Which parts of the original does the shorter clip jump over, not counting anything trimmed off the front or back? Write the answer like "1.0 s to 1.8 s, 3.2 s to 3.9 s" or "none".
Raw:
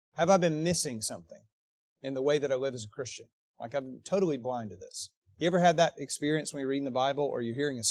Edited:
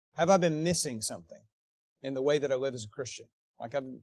none